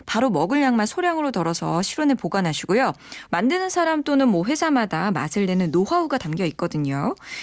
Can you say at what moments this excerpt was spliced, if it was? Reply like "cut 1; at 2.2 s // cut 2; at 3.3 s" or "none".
cut 1; at 3.3 s